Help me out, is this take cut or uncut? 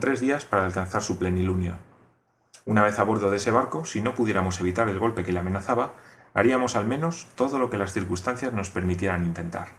uncut